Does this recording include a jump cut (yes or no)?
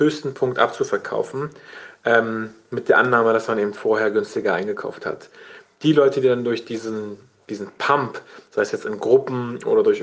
no